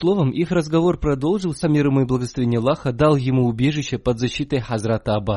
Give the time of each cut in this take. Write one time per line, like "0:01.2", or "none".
0:01.6